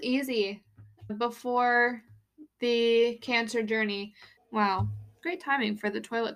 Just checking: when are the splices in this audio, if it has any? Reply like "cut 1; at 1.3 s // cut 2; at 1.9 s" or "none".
cut 1; at 1.1 s // cut 2; at 4.4 s